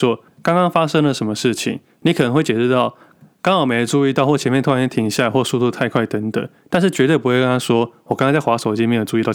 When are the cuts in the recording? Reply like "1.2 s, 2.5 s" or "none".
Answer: none

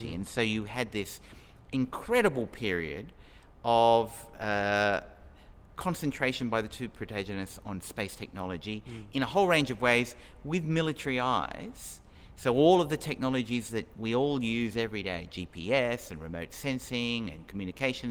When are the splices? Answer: none

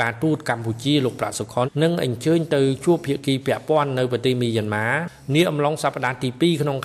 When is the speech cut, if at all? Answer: 1.6 s

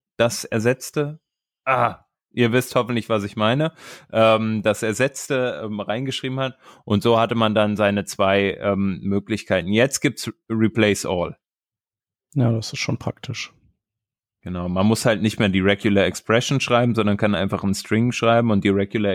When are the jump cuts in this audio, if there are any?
none

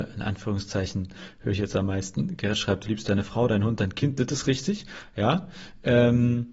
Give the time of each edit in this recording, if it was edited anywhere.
none

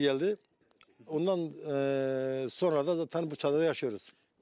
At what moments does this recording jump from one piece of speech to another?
none

